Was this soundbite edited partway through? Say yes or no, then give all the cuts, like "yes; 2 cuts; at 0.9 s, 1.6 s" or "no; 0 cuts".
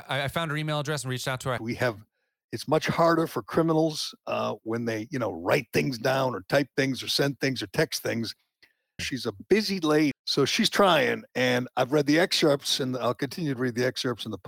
yes; 3 cuts; at 1.6 s, 9.0 s, 10.1 s